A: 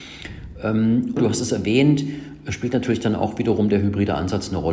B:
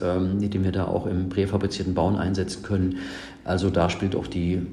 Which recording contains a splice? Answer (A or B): A